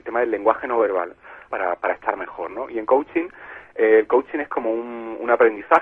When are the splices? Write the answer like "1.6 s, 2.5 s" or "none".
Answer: 1.5 s